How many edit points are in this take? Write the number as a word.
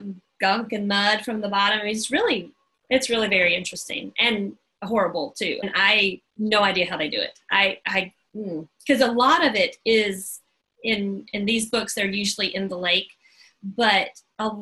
zero